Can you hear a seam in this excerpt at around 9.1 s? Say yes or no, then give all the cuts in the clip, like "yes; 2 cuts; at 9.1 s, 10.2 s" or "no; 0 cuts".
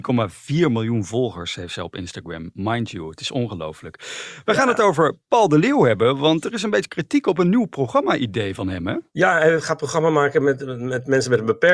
yes; 1 cut; at 9.1 s